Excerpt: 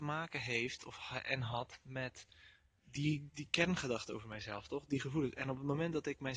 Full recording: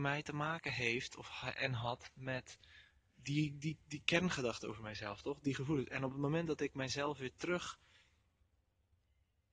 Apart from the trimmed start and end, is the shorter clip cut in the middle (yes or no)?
yes